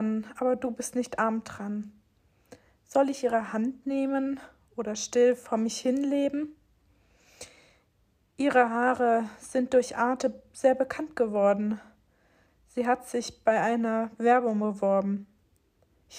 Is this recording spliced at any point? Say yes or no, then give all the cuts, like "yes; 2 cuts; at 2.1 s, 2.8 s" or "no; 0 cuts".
no; 0 cuts